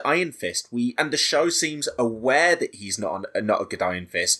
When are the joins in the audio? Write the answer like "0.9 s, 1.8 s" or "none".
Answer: 1.0 s